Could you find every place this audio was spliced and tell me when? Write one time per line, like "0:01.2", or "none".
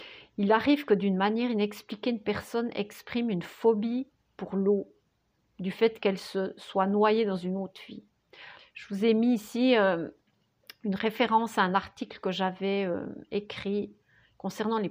0:08.6